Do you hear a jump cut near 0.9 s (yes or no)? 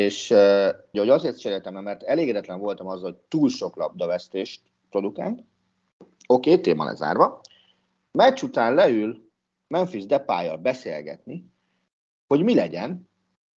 yes